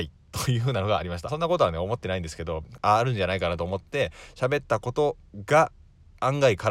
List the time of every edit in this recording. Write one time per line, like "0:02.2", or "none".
0:01.3
0:02.8